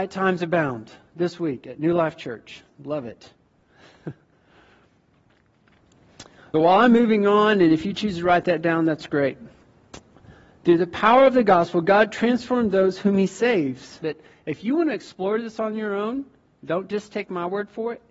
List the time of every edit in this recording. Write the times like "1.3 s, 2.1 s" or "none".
6.5 s, 14.0 s